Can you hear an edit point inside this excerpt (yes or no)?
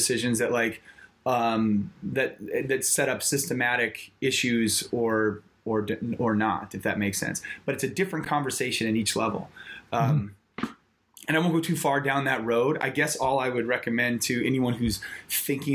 no